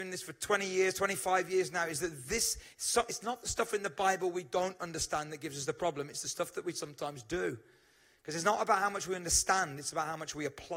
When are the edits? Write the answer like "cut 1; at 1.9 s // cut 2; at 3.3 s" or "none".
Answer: none